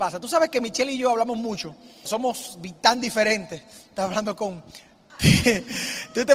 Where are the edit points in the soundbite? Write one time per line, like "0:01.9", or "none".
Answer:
0:02.1
0:05.1